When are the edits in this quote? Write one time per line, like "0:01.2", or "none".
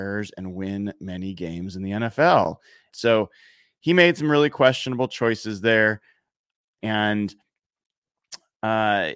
0:02.9
0:06.8